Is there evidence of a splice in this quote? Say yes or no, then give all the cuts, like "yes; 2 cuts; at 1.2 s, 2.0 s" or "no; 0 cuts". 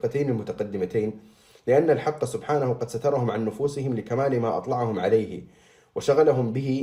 no; 0 cuts